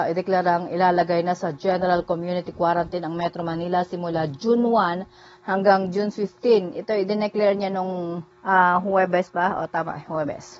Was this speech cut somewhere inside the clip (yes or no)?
yes